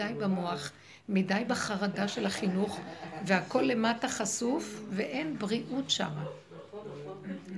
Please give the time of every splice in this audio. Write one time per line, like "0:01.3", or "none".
none